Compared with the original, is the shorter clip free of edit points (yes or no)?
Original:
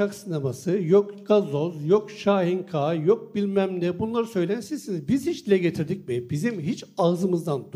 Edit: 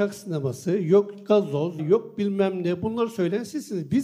no